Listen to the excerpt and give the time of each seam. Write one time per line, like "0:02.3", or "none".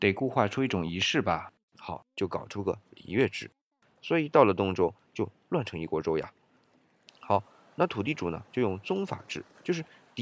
0:03.8
0:07.1